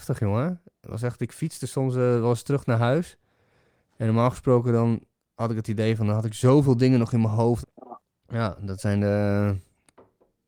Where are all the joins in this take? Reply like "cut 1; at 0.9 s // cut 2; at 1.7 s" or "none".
cut 1; at 7.6 s